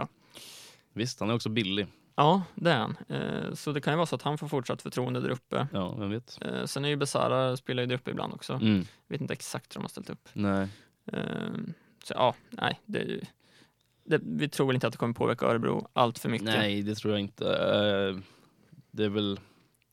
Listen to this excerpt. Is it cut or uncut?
uncut